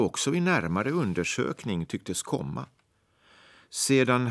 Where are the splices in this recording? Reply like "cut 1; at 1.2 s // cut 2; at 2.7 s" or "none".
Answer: none